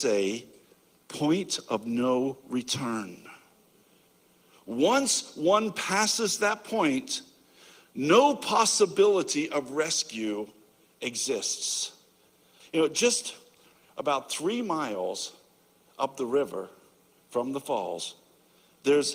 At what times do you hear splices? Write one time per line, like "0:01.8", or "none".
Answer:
0:12.6